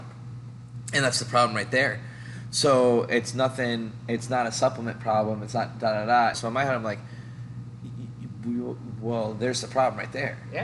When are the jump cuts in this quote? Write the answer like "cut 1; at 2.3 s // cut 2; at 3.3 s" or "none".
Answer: cut 1; at 6.3 s